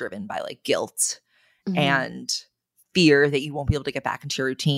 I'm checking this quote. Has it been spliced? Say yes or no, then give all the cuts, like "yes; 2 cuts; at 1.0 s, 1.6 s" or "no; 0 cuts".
no; 0 cuts